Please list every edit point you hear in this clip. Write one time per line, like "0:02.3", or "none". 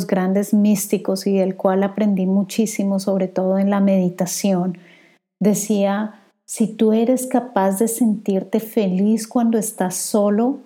none